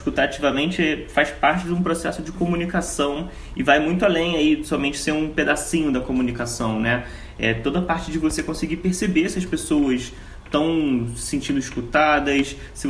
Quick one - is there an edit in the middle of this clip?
no; 0 cuts

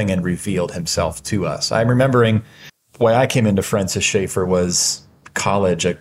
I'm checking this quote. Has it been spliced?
no; 0 cuts

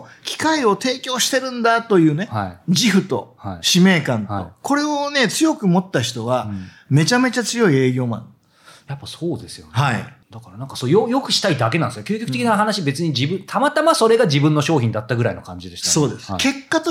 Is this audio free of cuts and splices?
no; 1 cut; at 10.2 s

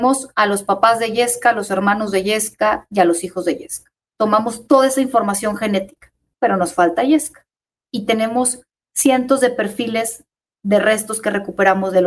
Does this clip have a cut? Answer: no; 0 cuts

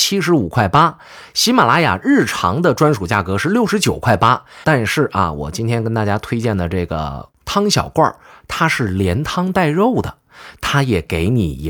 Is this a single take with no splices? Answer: no; 2 cuts; at 4.6 s, 10.6 s

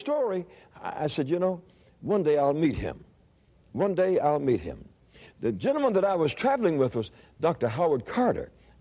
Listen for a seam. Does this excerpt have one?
no; 0 cuts

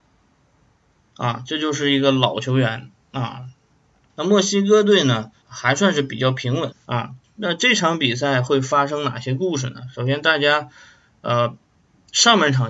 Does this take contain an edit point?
yes; 3 cuts; at 4.1 s, 5.4 s, 6.7 s

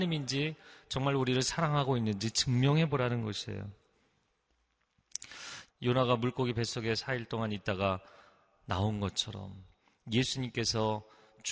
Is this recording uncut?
no; 1 cut; at 5.7 s

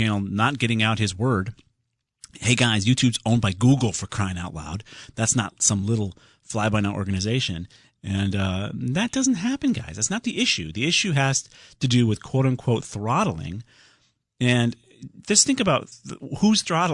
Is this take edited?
yes; 1 cut; at 8.0 s

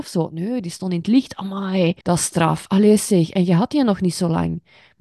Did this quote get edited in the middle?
yes; 1 cut; at 2.0 s

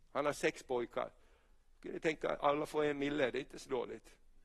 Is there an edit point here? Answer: no; 0 cuts

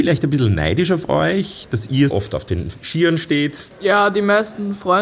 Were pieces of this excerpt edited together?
yes; 2 cuts; at 2.1 s, 3.7 s

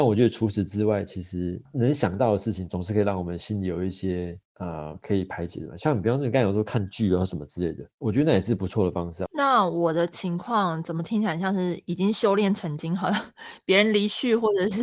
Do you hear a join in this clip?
yes; 1 cut; at 9.3 s

